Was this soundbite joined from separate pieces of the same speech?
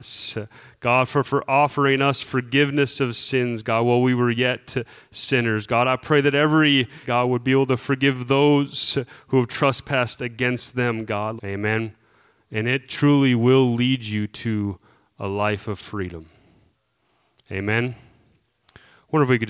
yes; 2 cuts; at 7.0 s, 11.4 s

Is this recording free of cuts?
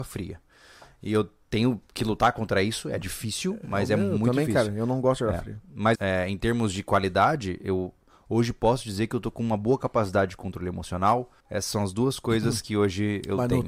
no; 2 cuts; at 5.9 s, 11.4 s

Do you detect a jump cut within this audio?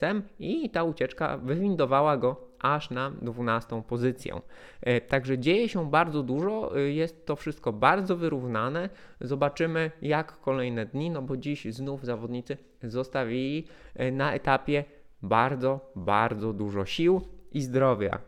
no; 0 cuts

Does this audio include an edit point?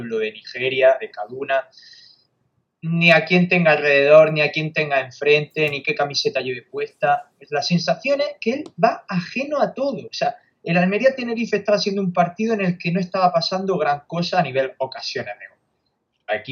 no; 0 cuts

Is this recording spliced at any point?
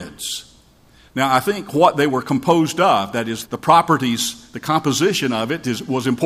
yes; 1 cut; at 3.5 s

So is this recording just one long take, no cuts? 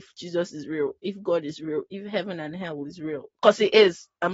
yes; 0 cuts

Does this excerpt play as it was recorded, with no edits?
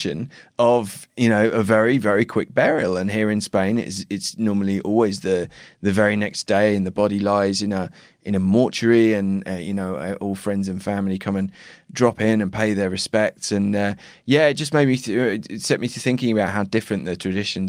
yes; 0 cuts

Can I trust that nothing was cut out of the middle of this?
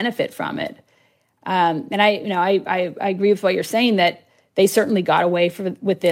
yes; 0 cuts

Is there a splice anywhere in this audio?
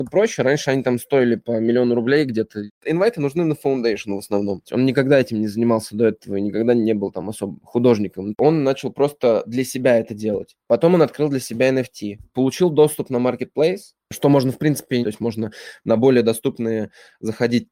yes; 2 cuts; at 4.6 s, 15.0 s

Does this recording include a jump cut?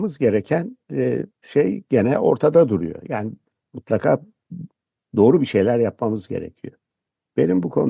yes; 1 cut; at 1.3 s

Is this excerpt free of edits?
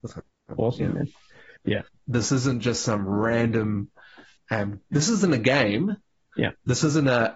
no; 1 cut; at 1.6 s

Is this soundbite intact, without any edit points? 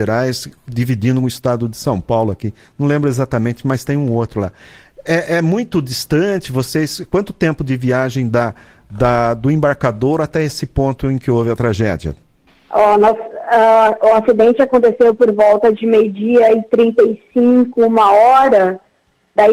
yes; 0 cuts

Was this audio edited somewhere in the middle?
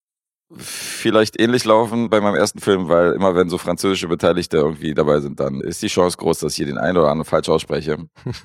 yes; 2 cuts; at 2.1 s, 5.6 s

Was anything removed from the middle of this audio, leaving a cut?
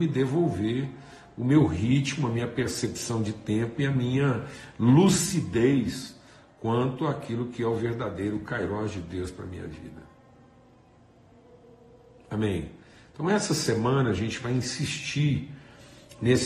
no; 0 cuts

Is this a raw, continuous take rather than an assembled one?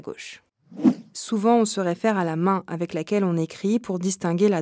no; 1 cut; at 1.1 s

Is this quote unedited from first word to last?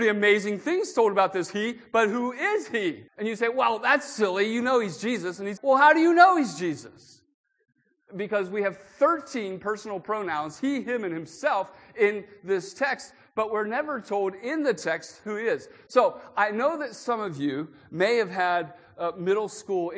no; 3 cuts; at 3.1 s, 5.6 s, 8.1 s

